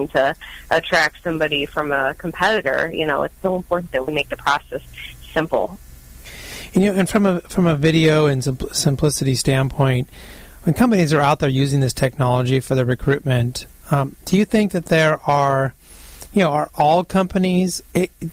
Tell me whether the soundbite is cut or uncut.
uncut